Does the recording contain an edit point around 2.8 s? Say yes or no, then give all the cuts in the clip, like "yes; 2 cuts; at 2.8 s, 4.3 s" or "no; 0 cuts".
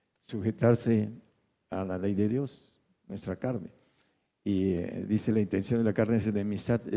no; 0 cuts